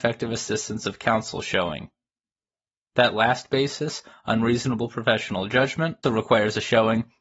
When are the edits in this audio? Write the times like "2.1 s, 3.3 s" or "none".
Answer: 6.0 s